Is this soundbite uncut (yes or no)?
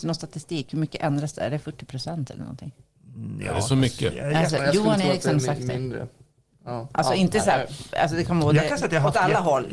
yes